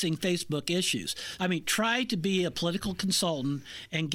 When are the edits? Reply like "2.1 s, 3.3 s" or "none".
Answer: 1.4 s